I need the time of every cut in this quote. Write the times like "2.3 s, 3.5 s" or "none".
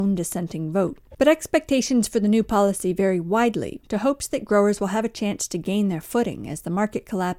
1.1 s, 3.8 s